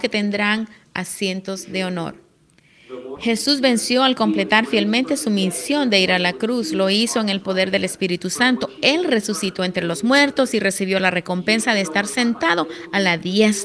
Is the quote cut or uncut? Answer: cut